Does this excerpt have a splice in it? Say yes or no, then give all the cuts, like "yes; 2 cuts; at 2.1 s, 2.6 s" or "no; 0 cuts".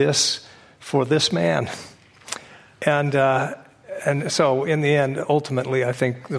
no; 0 cuts